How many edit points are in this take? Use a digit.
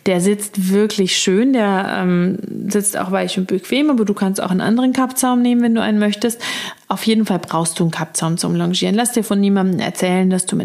0